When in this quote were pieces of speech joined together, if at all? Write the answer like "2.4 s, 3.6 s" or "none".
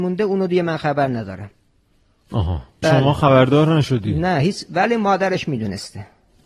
2.8 s